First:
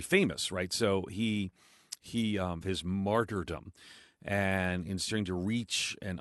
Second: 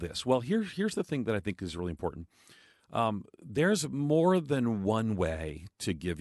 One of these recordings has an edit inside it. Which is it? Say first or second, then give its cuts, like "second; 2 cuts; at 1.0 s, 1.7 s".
first; 1 cut; at 2.6 s